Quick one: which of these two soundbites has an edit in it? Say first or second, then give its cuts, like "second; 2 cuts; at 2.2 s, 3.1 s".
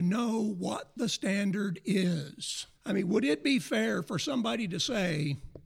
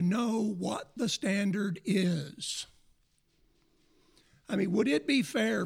first; 1 cut; at 2.7 s